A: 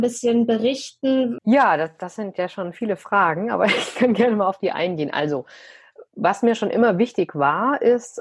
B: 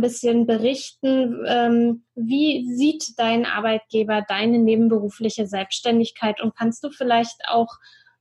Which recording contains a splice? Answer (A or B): A